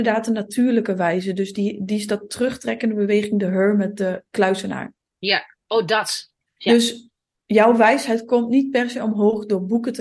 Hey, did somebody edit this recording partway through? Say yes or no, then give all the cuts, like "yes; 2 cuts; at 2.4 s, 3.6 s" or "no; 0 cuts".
no; 0 cuts